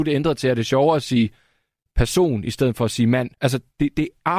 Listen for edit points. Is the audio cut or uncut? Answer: cut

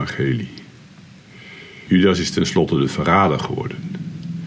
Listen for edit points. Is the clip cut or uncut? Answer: cut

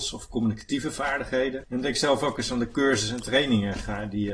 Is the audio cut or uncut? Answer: cut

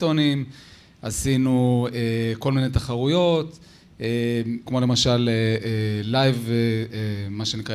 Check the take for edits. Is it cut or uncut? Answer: cut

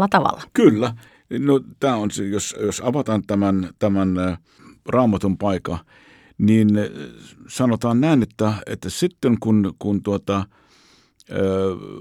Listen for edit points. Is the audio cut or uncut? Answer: uncut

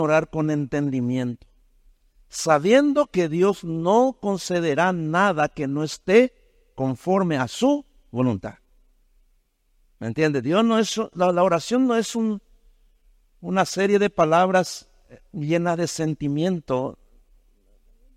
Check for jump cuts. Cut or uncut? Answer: uncut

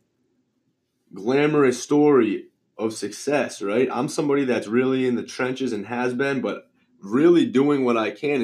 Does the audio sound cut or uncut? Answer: uncut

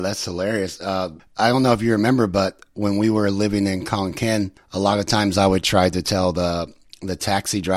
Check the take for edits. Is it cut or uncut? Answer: uncut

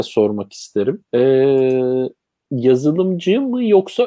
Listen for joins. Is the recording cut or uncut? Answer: cut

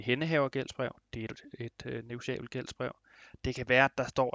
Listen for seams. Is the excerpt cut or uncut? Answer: uncut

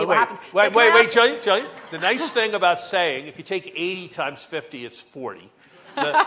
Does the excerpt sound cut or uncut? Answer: uncut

